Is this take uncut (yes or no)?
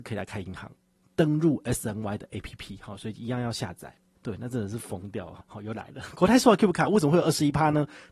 no